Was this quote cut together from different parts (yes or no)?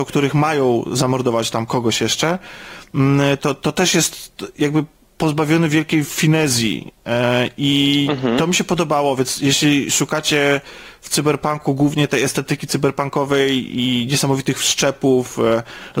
yes